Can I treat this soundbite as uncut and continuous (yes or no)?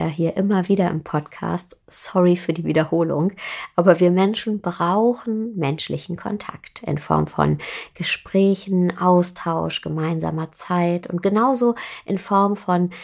yes